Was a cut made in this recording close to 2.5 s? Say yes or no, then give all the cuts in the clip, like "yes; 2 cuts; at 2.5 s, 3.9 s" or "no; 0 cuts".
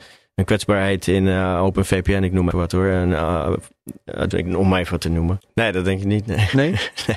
yes; 3 cuts; at 2.5 s, 4.3 s, 5.4 s